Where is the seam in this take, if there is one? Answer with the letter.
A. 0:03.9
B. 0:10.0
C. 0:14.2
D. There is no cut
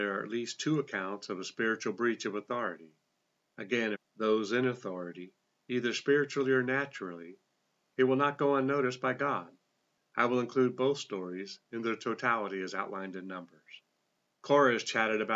A